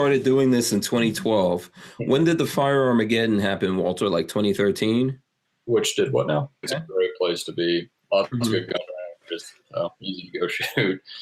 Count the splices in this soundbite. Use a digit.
1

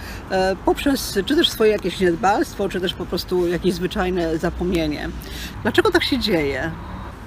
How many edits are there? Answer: 1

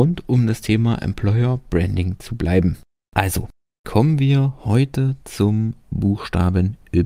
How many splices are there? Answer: 0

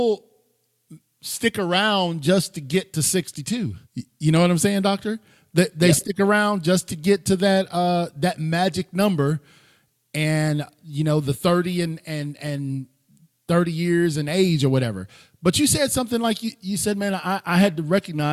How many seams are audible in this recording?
1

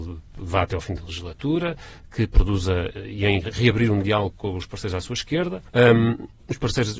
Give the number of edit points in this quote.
1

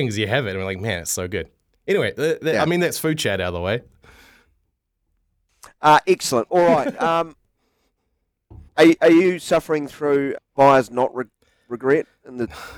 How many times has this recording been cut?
2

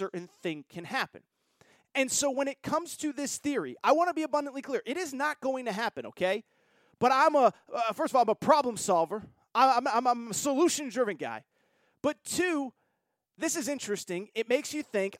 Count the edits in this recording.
0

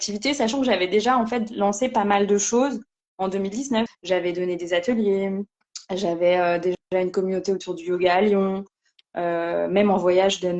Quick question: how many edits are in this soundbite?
1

